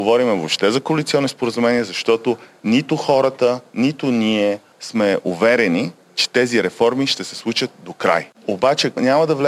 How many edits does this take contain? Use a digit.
1